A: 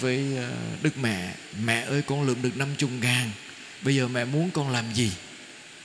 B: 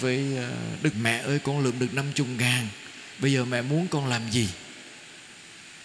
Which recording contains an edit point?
B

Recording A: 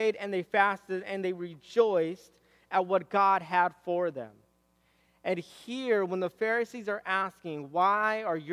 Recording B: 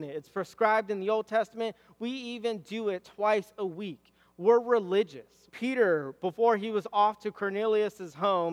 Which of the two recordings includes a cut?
B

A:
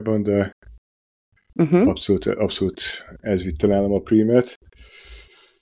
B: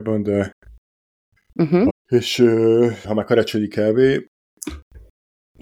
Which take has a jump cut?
B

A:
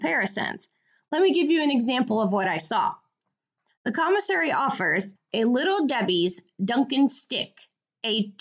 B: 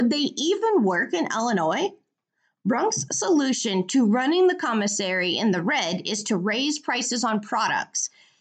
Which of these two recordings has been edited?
A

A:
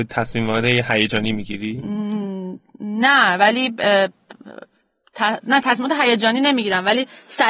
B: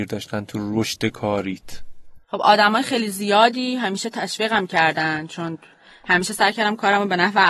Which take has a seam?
B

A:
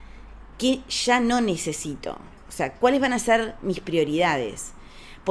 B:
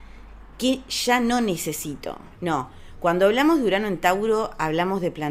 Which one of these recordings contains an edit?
B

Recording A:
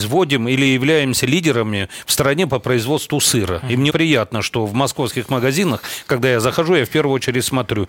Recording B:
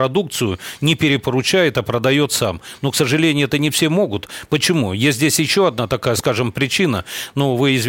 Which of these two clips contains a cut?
A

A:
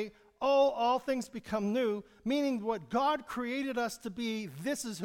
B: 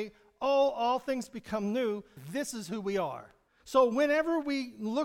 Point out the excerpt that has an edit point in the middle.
B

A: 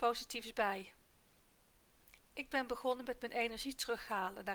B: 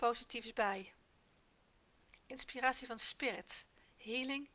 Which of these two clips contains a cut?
A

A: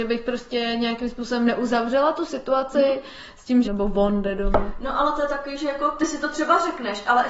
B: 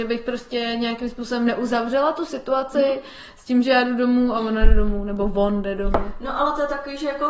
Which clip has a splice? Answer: A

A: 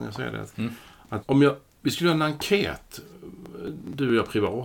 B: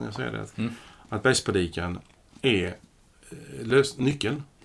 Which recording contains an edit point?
A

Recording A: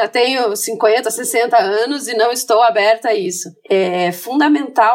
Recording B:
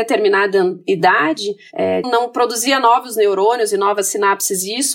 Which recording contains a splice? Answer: B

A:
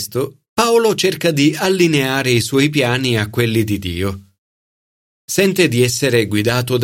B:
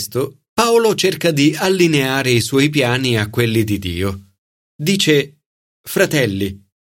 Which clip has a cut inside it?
B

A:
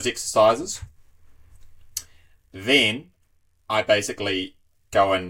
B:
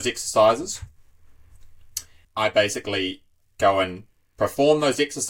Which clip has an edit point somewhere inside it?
B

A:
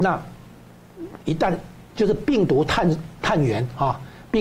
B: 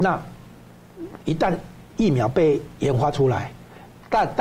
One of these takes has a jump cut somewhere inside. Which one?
A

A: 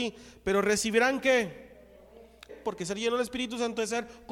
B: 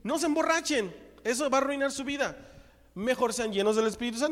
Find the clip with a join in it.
A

